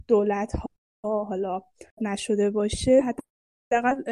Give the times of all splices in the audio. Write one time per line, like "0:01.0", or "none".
0:01.9